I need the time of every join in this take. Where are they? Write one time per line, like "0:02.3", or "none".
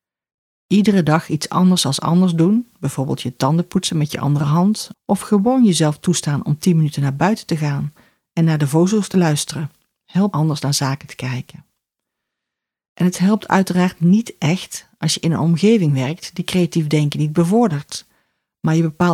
0:04.9